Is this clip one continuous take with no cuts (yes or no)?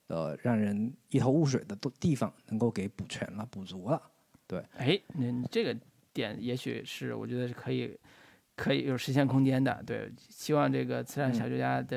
yes